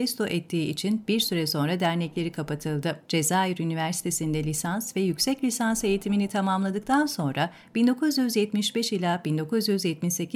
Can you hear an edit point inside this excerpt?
no; 0 cuts

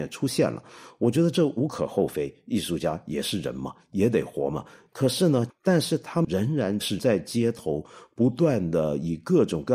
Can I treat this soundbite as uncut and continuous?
no; 1 cut; at 5.5 s

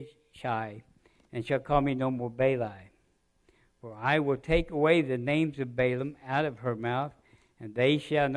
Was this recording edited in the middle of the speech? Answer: no; 0 cuts

